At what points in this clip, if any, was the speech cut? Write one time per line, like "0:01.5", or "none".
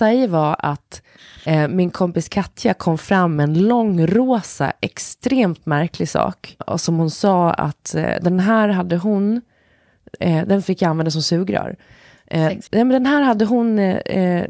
0:06.6
0:12.7